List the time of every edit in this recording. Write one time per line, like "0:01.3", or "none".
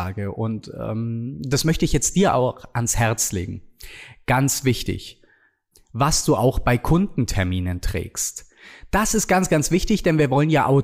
0:05.7